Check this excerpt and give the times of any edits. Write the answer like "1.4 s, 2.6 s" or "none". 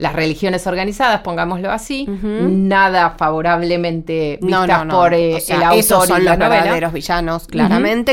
none